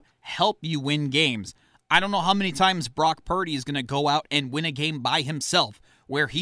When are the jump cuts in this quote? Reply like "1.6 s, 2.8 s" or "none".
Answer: none

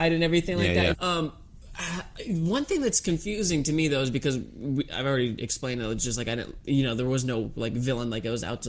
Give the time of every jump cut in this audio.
0.9 s

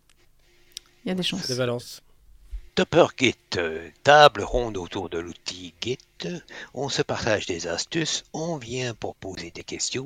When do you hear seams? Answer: 2.7 s

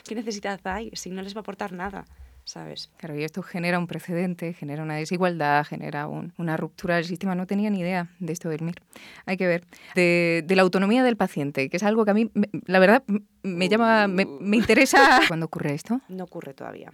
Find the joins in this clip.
2.9 s, 9.9 s, 15.3 s

